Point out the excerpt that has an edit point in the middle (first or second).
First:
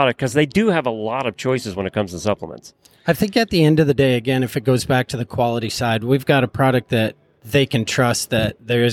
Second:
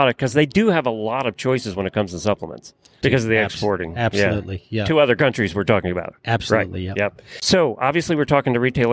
second